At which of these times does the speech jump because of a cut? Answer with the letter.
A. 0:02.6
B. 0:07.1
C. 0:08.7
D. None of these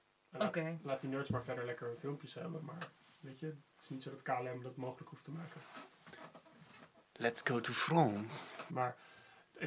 C